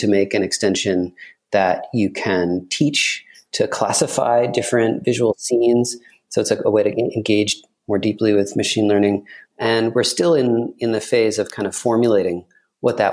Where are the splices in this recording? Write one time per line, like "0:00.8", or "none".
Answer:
0:09.4